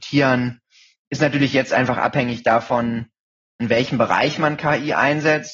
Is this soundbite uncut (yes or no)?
yes